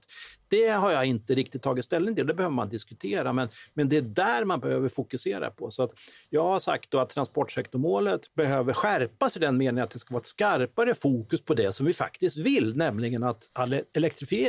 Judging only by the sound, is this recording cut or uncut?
cut